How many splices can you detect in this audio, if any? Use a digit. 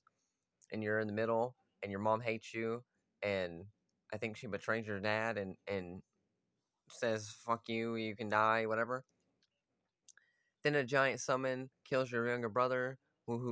0